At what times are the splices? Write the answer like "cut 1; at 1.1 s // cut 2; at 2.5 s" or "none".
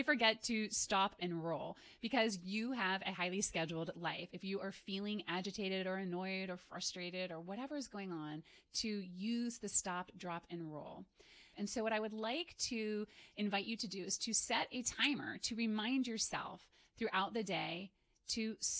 cut 1; at 1.2 s // cut 2; at 4.3 s // cut 3; at 11.5 s